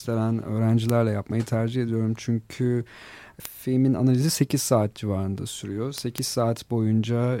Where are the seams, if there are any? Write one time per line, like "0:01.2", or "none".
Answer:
0:03.4